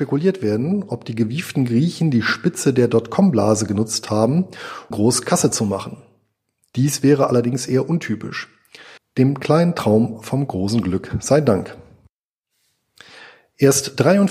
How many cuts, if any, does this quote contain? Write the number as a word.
two